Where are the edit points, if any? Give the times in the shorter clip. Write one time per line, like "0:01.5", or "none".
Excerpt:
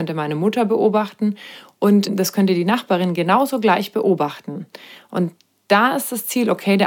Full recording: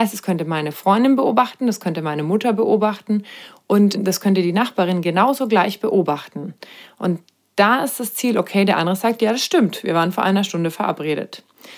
none